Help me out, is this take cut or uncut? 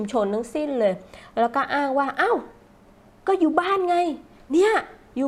uncut